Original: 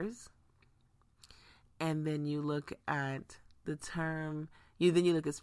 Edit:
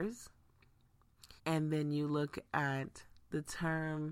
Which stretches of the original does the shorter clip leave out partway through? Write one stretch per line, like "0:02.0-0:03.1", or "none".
0:01.4-0:01.7